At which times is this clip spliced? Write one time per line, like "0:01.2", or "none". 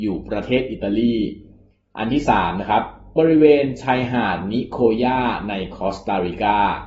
none